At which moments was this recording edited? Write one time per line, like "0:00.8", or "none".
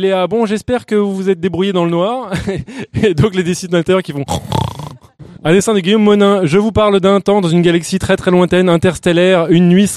0:05.4